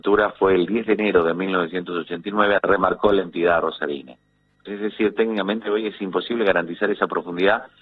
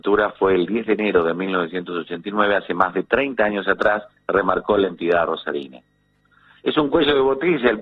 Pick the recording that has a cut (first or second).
first